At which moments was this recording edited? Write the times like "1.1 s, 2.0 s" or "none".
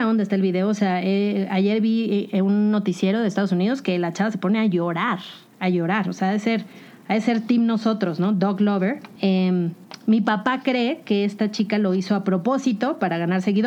9.2 s